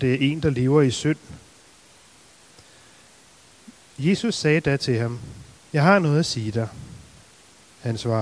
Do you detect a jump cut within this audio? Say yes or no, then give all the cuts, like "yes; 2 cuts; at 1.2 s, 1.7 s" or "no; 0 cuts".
yes; 1 cut; at 5.6 s